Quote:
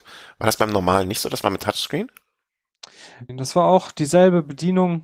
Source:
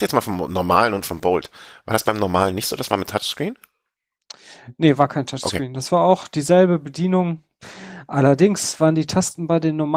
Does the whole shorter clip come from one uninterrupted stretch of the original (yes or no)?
no